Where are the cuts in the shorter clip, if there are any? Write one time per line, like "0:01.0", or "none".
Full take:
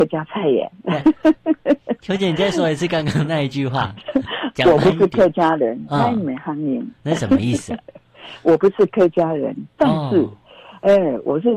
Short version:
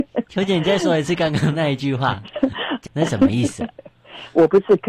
0:02.9